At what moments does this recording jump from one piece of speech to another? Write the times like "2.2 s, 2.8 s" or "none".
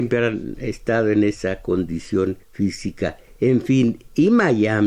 2.4 s